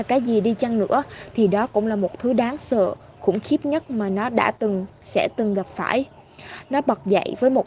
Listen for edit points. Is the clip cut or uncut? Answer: uncut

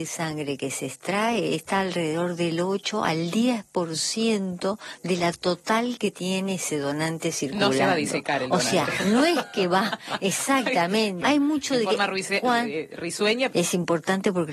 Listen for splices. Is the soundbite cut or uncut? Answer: cut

